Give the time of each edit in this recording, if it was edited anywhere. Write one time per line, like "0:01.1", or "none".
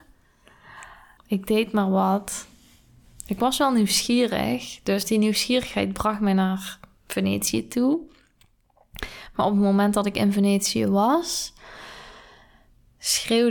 0:01.2